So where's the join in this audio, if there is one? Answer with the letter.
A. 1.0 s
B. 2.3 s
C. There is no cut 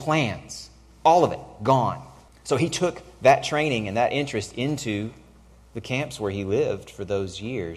B